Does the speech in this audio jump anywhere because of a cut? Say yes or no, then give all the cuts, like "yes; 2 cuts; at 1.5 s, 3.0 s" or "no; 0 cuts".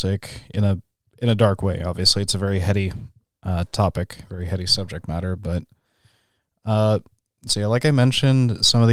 no; 0 cuts